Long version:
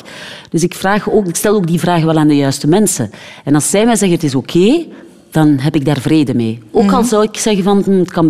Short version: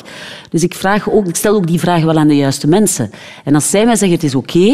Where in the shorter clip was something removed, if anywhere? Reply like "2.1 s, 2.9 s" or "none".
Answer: none